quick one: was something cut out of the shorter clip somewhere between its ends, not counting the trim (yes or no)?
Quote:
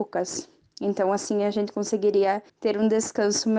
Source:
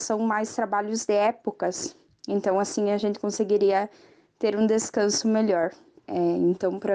yes